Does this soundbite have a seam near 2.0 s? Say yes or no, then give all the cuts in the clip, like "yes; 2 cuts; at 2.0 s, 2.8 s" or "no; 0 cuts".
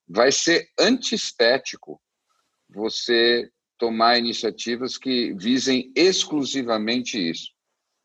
no; 0 cuts